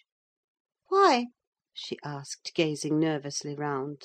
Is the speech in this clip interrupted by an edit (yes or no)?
no